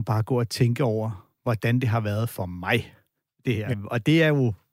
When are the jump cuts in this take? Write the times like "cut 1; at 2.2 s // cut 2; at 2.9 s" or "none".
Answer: cut 1; at 3.7 s